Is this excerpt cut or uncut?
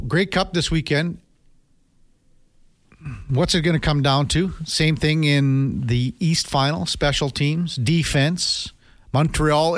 uncut